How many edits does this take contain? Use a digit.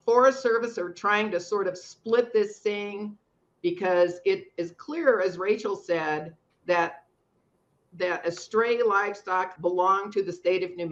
1